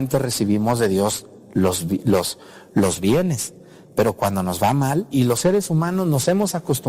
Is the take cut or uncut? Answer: cut